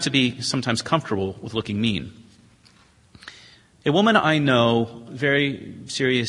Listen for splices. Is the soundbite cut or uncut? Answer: cut